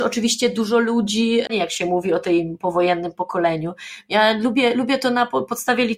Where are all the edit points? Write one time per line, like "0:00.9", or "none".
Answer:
0:01.5